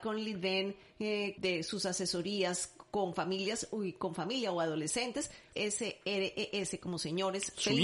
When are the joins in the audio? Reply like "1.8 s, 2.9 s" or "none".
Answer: 1.4 s, 5.5 s